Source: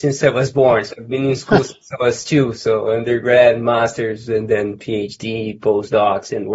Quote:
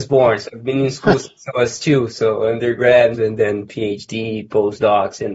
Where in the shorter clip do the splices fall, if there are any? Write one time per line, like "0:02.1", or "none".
0:03.1